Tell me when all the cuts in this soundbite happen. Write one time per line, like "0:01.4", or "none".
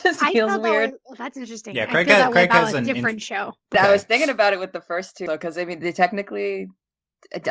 0:03.7
0:05.3